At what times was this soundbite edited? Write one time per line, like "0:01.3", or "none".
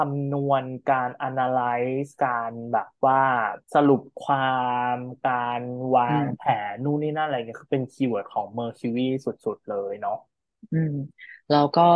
0:03.6